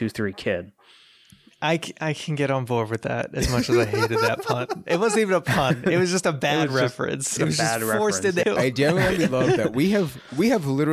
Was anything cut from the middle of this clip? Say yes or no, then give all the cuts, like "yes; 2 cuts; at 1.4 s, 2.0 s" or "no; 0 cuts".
yes; 2 cuts; at 7.4 s, 8.4 s